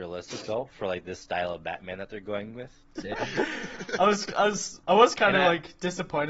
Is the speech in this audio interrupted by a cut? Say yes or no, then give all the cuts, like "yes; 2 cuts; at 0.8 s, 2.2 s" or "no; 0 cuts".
yes; 2 cuts; at 3.0 s, 4.8 s